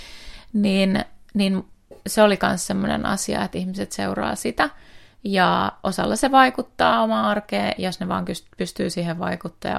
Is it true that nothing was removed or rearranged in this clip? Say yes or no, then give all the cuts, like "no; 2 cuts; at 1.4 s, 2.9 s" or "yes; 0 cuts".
yes; 0 cuts